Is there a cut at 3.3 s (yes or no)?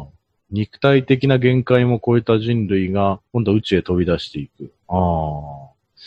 yes